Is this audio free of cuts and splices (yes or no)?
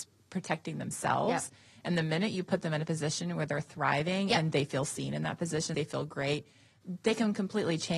no